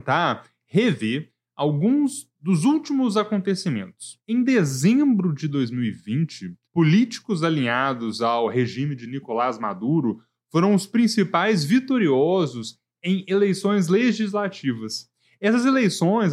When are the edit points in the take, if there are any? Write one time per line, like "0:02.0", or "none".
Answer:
0:04.2
0:06.6